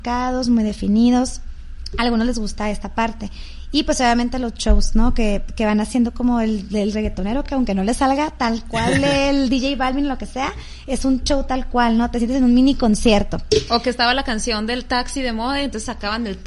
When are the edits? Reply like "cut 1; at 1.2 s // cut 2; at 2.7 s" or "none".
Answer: none